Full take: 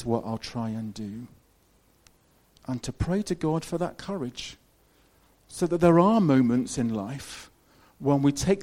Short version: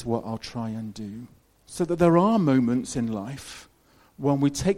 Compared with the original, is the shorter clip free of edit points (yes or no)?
no